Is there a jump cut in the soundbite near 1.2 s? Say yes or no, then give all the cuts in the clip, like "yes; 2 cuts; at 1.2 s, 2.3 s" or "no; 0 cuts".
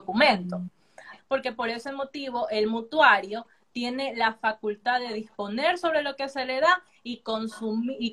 yes; 1 cut; at 1.2 s